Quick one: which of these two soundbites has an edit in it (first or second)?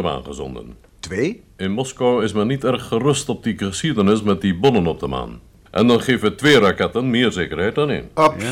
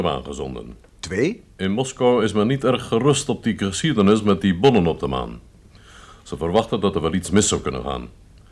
first